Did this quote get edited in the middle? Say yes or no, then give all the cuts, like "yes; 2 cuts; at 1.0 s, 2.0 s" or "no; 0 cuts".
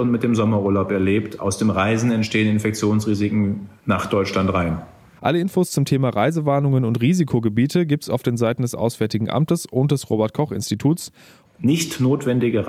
yes; 2 cuts; at 5.2 s, 11.4 s